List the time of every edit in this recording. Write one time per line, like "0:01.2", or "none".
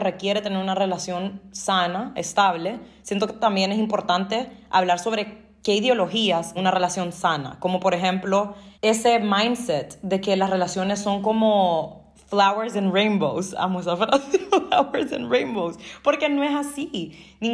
0:06.6
0:08.7